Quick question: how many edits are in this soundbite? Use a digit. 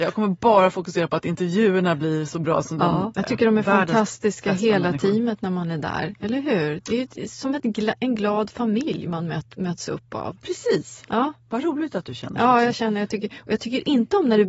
1